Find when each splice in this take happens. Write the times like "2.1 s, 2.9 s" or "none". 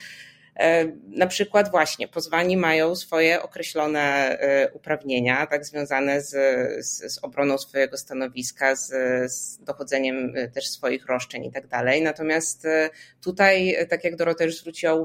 none

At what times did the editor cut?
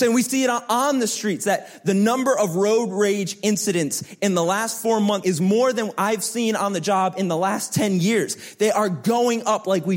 5.2 s

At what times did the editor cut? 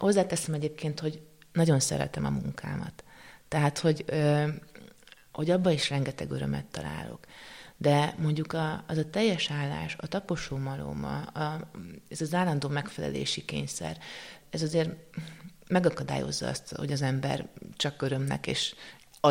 14.4 s

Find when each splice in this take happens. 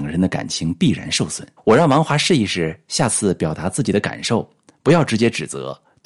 1.6 s

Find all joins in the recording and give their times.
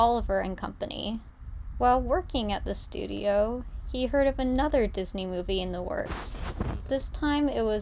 none

